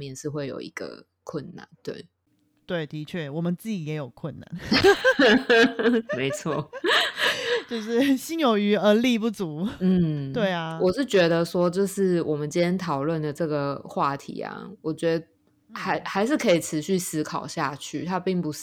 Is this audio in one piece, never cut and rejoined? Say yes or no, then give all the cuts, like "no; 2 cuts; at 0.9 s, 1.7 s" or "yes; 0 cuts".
no; 1 cut; at 1.7 s